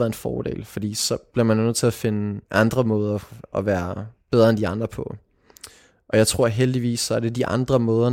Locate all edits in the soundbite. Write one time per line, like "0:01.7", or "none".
0:02.4